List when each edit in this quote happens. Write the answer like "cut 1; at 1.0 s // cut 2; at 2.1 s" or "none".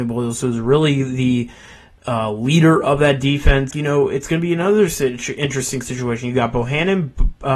cut 1; at 3.7 s